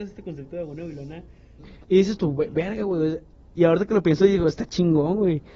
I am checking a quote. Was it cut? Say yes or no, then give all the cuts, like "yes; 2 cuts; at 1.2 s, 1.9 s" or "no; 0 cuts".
yes; 2 cuts; at 1.6 s, 3.5 s